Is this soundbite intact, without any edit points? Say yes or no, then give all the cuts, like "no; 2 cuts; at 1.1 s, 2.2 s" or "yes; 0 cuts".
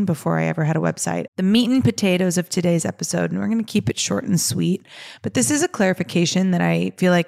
no; 1 cut; at 1.3 s